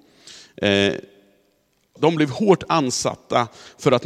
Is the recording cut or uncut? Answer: cut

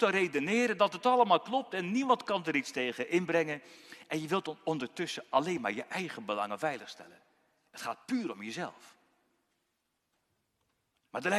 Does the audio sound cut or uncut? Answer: uncut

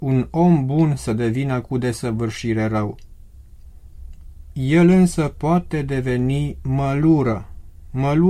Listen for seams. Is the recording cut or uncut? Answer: uncut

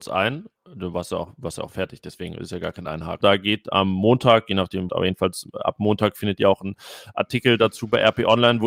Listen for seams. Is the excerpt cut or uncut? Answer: cut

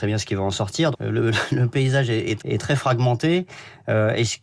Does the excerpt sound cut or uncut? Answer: cut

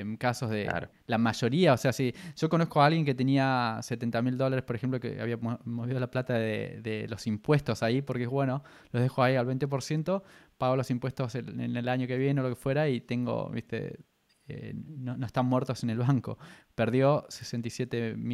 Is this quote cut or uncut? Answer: uncut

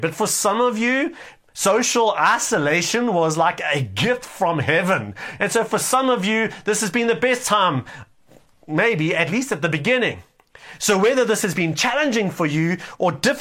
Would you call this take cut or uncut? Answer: cut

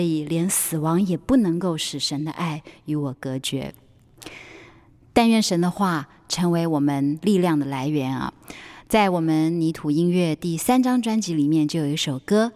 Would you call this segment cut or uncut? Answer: uncut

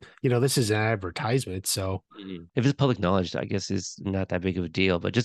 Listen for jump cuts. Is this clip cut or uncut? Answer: cut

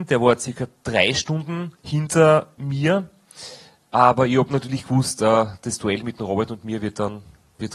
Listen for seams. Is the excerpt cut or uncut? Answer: cut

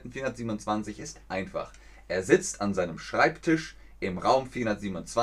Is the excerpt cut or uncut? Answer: uncut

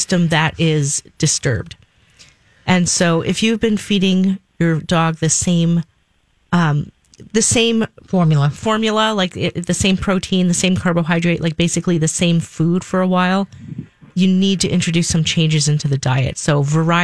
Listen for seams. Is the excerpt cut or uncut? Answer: uncut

